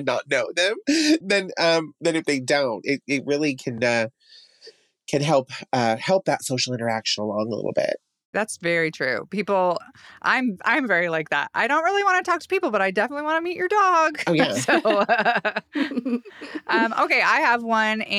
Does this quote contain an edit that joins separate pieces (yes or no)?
yes